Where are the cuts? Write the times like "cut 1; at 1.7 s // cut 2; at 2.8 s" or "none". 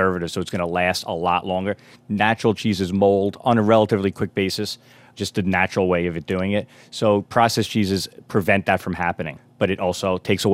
none